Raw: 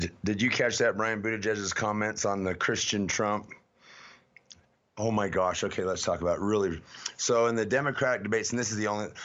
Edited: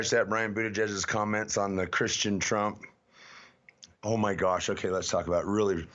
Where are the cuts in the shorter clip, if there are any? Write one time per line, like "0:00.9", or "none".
0:03.9